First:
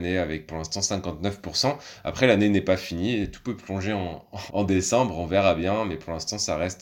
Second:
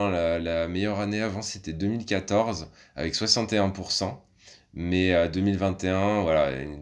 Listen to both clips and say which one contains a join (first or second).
first